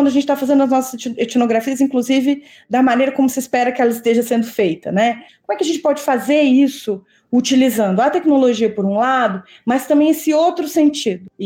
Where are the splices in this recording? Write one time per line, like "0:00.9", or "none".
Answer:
0:05.3

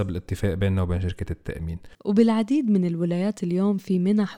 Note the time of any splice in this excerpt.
0:01.9

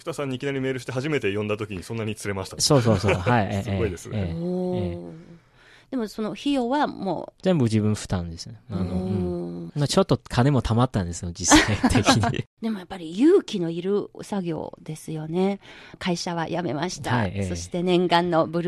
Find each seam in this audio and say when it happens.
none

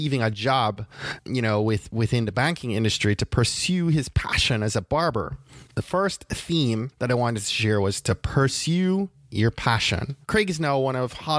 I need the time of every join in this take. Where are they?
0:05.7
0:10.2

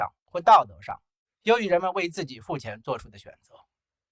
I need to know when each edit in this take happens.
none

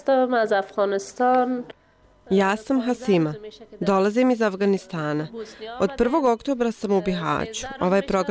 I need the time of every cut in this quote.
none

